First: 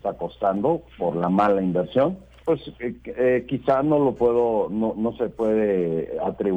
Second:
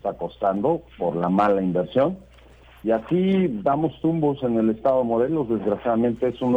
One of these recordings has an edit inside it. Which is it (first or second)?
first